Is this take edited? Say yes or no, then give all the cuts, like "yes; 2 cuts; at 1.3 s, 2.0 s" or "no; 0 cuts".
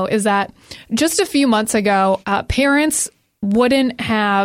yes; 1 cut; at 2.2 s